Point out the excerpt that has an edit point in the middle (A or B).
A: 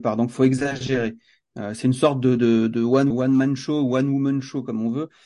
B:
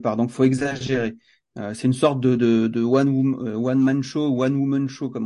A